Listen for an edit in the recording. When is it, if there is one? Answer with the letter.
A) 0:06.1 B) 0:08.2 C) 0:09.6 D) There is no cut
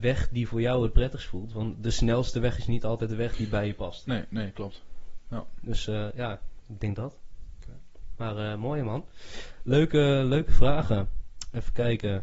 D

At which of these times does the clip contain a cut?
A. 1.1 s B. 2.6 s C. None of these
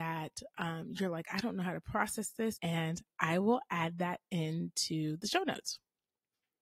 B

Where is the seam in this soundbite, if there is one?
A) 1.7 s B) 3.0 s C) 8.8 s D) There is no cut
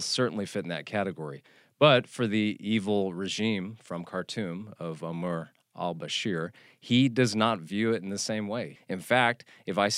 C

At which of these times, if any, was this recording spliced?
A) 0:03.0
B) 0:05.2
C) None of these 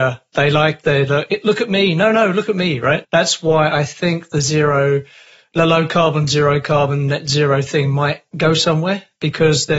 A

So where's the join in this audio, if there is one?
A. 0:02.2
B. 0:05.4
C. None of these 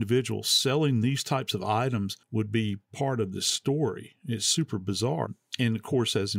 A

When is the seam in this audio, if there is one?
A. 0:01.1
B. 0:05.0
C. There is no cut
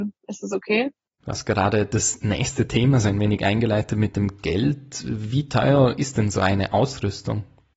A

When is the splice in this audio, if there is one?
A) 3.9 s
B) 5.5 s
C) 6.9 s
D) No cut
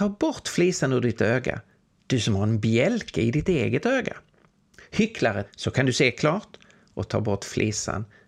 B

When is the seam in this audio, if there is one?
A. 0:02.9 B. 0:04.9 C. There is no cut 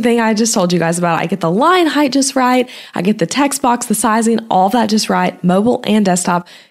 C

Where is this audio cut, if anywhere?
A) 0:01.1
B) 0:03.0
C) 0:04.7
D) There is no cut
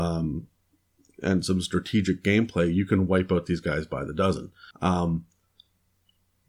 C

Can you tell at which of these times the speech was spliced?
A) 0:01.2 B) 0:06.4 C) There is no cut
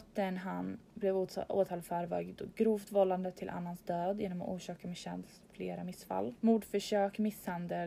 B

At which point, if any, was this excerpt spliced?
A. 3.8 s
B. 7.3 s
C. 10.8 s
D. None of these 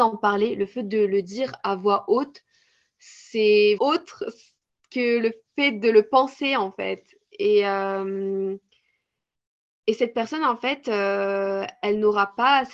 A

